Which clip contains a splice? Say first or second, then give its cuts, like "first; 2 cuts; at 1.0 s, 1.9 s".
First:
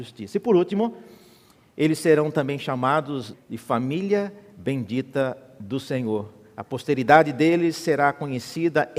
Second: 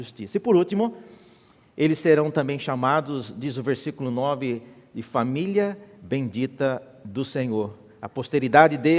first; 1 cut; at 3.3 s